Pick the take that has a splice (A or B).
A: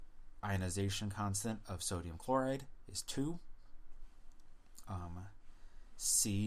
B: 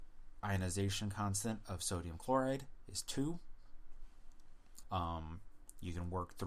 B